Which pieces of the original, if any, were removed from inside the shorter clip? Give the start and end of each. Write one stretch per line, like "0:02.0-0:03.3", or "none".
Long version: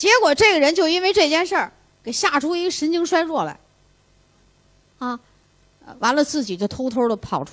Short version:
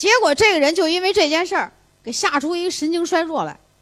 none